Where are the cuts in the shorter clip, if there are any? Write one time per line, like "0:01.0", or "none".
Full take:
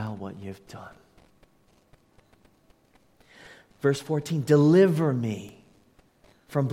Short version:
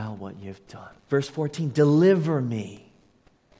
0:01.0